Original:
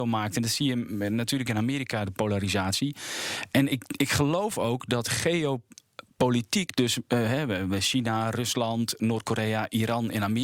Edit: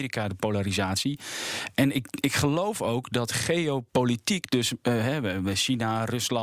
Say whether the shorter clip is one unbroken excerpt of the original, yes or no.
no